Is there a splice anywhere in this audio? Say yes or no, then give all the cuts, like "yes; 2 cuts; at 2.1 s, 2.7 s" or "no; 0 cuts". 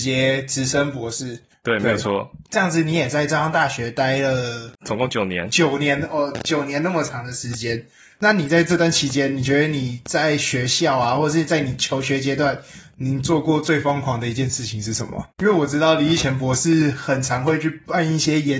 yes; 2 cuts; at 4.8 s, 15.3 s